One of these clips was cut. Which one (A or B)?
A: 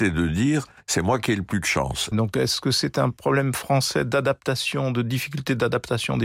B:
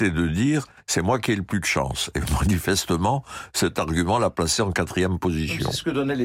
A